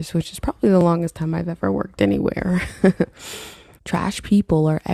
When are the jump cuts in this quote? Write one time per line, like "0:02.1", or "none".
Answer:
0:03.8